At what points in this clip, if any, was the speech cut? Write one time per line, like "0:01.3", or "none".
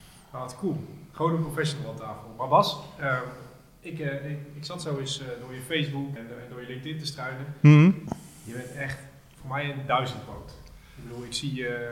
0:06.2